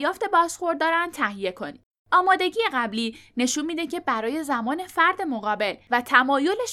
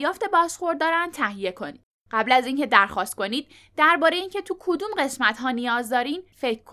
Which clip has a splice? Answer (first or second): first